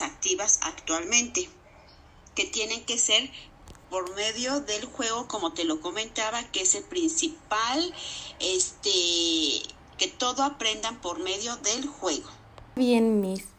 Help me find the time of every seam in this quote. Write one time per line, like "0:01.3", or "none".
0:10.0